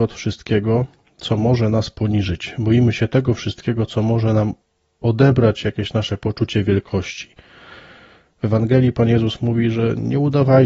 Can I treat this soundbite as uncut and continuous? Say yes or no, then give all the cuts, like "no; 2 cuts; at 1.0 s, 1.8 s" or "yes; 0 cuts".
yes; 0 cuts